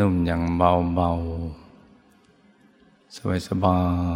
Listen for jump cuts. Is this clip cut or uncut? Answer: uncut